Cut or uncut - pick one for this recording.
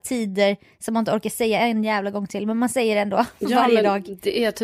uncut